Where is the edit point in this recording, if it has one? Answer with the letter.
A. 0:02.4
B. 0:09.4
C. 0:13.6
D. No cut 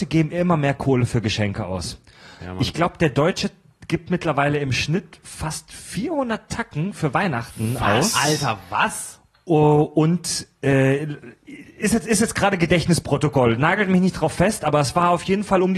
A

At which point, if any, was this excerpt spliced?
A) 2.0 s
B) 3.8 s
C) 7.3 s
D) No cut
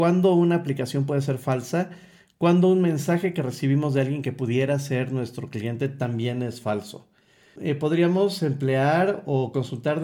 D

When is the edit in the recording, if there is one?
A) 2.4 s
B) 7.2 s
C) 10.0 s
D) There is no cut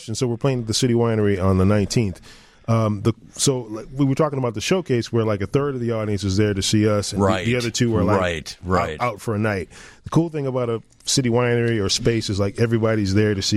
B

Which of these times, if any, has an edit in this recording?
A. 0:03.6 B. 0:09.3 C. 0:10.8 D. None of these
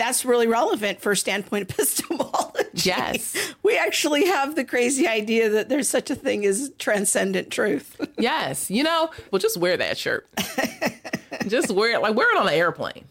B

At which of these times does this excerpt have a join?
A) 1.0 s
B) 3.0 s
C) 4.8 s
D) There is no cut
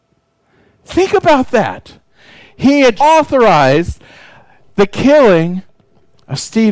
B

